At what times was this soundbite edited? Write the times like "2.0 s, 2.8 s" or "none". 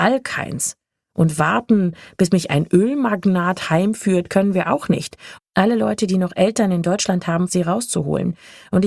5.4 s, 7.5 s

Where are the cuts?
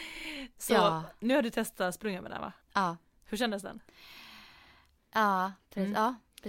2.6 s, 5.0 s

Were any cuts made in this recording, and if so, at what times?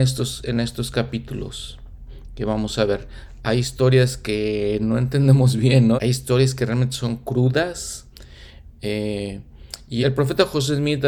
5.9 s, 10.0 s

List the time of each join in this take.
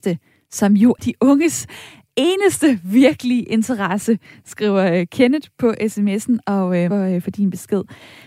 1.0 s, 6.9 s

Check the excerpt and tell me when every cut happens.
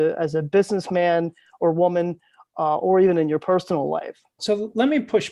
4.4 s

